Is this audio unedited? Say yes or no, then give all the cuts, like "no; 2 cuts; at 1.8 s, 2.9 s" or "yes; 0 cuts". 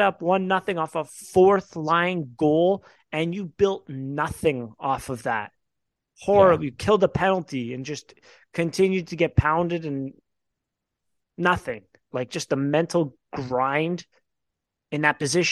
no; 1 cut; at 12.1 s